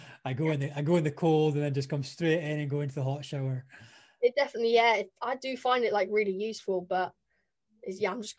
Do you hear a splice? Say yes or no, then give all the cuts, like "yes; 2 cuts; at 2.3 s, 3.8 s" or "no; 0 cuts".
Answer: no; 0 cuts